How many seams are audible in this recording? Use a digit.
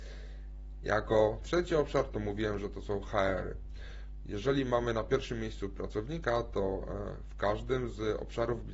0